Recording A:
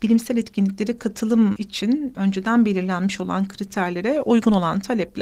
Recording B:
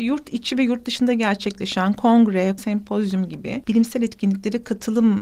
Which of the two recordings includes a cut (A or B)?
B